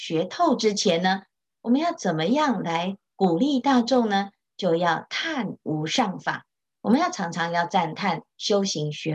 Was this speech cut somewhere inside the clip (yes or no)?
no